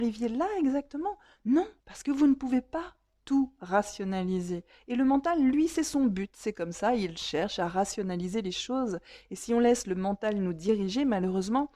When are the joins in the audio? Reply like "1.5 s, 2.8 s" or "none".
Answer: 1.8 s